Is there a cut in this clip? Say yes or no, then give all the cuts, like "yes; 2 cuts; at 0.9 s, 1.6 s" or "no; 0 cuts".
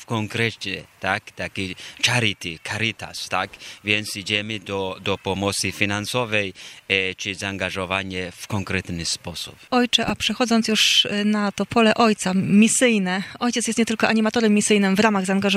no; 0 cuts